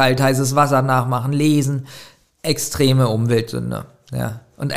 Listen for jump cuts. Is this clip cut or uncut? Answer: uncut